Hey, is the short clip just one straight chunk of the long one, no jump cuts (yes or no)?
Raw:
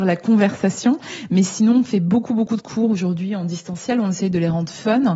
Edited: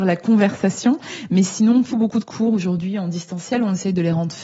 no